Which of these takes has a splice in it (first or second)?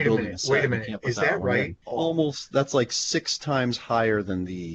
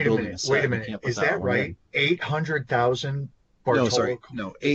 first